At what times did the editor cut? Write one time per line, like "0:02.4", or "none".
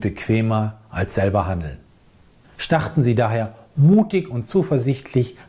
0:02.4